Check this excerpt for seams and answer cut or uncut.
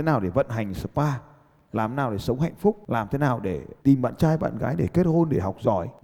uncut